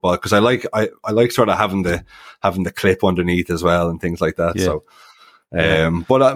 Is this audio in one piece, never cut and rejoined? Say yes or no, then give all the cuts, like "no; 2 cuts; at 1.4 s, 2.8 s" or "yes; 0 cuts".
yes; 0 cuts